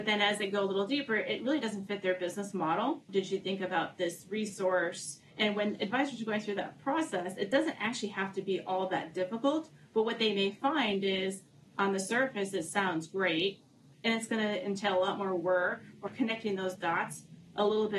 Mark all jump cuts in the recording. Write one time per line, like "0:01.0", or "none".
0:03.1
0:13.9
0:16.1